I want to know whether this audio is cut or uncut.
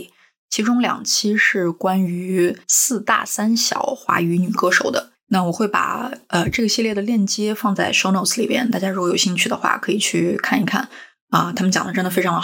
uncut